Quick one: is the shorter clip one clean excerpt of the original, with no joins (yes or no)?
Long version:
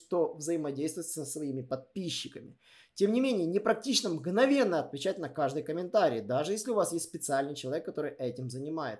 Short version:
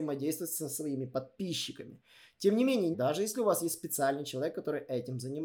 no